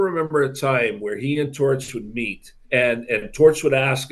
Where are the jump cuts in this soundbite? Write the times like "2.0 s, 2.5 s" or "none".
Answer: 2.6 s